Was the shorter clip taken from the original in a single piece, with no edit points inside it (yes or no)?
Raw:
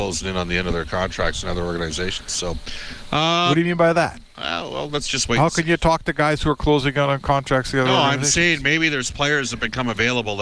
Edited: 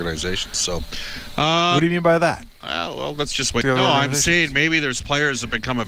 no